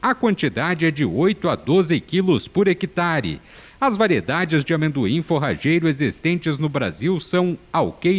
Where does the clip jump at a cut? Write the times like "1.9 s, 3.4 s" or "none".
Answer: none